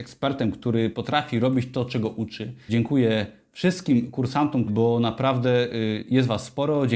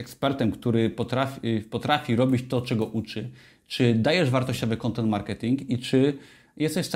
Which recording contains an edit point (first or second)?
first